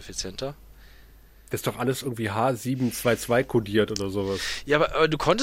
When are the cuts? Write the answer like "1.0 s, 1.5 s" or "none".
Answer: none